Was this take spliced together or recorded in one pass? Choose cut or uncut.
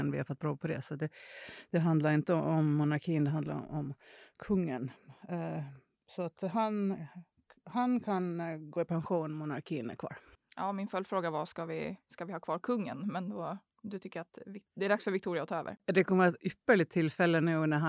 uncut